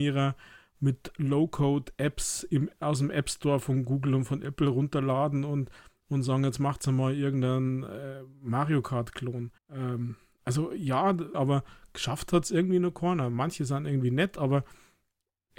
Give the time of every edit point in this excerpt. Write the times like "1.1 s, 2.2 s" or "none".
9.6 s, 11.3 s

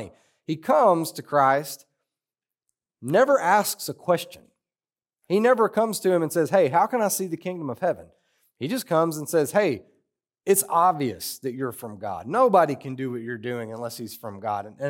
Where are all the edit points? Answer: none

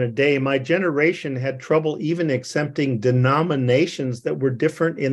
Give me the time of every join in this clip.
none

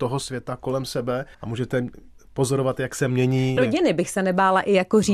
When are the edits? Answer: 1.3 s, 3.6 s

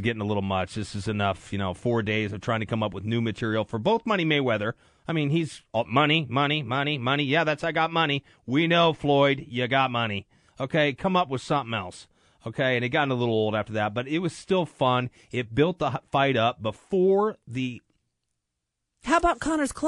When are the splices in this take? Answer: none

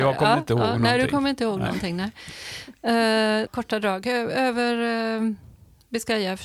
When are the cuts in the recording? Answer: 3.5 s

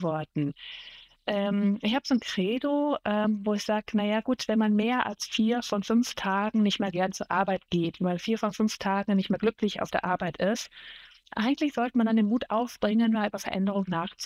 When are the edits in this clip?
none

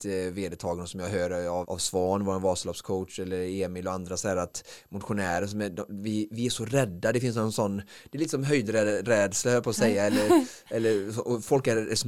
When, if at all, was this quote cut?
1.6 s

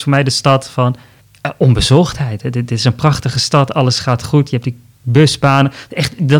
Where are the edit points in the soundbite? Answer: none

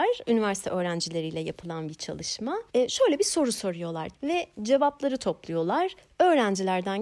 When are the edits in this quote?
2.7 s, 4.1 s

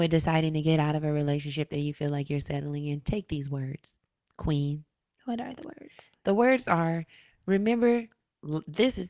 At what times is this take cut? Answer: none

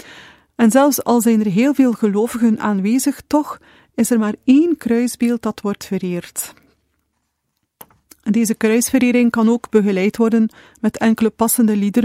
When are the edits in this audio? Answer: none

